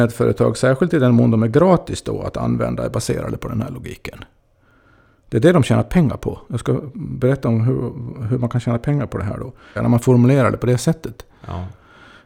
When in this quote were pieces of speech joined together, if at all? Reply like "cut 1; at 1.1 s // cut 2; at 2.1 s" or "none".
cut 1; at 9.8 s